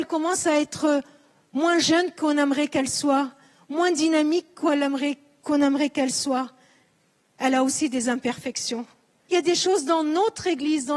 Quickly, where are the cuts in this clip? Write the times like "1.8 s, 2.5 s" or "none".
9.3 s